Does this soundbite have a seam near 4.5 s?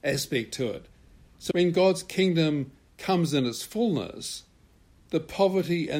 no; 1 cut; at 1.5 s

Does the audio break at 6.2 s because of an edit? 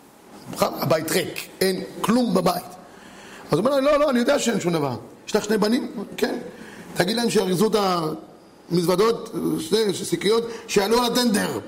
no; 0 cuts

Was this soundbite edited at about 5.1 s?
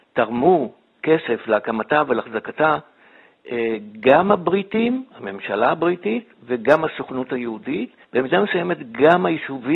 yes; 2 cuts; at 5.1 s, 8.0 s

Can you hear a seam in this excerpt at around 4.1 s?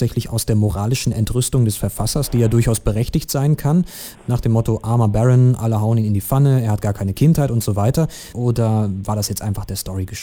yes; 2 cuts; at 4.1 s, 8.3 s

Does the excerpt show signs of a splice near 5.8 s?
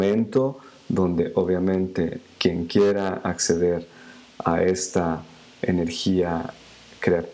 no; 0 cuts

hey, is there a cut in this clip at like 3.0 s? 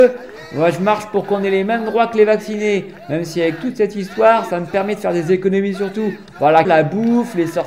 no; 1 cut; at 6.7 s

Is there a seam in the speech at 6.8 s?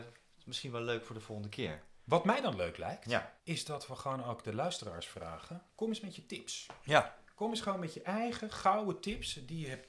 no; 1 cut; at 3.4 s

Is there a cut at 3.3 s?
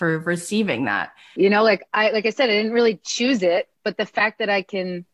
no; 1 cut; at 1.4 s

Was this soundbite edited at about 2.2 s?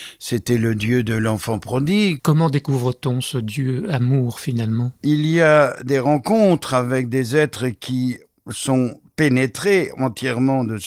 yes; 1 cut; at 2.2 s

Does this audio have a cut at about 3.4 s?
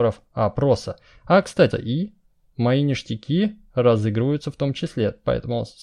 no; 1 cut; at 1.7 s

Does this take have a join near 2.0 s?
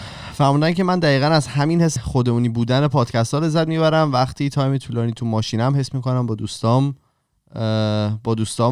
yes; 1 cut; at 2.0 s

